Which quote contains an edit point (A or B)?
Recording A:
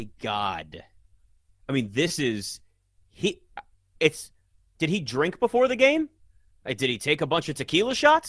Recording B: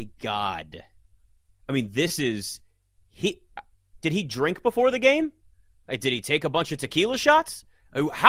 B